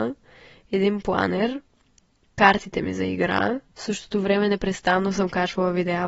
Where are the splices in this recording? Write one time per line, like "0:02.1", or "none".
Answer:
0:03.7